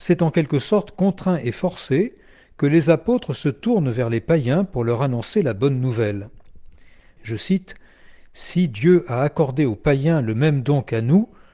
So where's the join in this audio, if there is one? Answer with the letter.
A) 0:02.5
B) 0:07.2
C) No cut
B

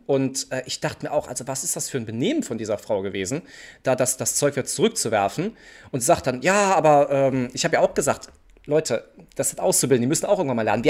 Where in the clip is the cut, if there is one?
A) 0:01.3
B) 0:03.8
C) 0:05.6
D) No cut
D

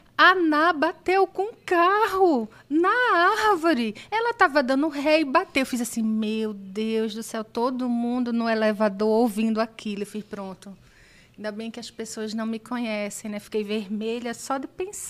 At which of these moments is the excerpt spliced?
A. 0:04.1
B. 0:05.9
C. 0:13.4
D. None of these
D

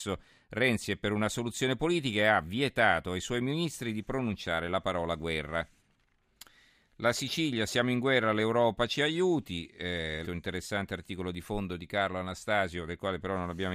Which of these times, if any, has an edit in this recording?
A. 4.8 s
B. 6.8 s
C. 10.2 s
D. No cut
C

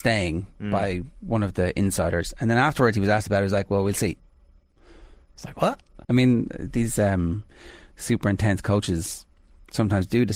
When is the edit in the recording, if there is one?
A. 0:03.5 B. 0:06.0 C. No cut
B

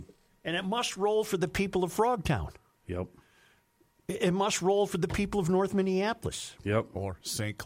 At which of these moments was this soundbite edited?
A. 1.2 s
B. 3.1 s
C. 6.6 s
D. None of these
D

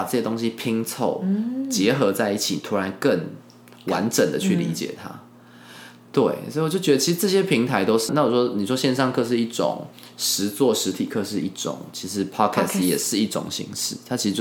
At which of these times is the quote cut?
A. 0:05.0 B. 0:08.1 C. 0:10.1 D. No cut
B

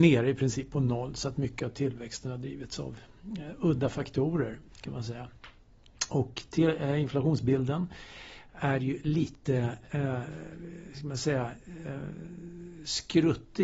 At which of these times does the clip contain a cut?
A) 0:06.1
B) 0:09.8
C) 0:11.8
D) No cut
D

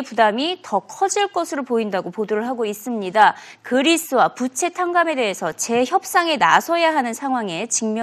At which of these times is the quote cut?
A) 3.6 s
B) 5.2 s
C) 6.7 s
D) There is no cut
D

